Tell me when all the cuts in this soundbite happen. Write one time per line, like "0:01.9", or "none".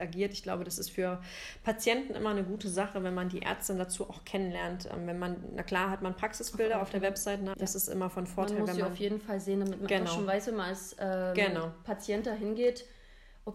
0:07.5